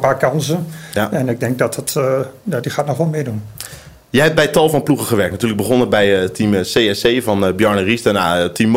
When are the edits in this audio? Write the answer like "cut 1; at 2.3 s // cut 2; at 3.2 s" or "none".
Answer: none